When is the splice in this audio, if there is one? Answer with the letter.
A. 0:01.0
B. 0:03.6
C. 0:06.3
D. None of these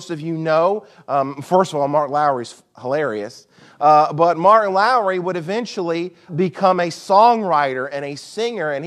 C